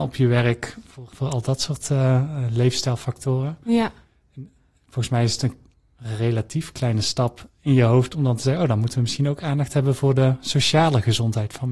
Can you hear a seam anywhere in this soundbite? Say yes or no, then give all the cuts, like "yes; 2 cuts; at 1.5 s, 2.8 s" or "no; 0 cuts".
yes; 1 cut; at 1.1 s